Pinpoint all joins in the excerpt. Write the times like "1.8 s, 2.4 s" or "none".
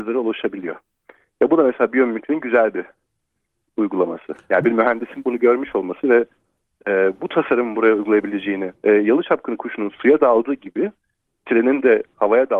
8.8 s